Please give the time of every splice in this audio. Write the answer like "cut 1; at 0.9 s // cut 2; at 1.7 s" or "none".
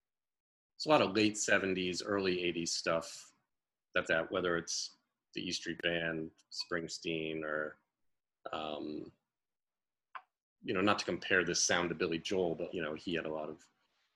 cut 1; at 4.1 s // cut 2; at 12.7 s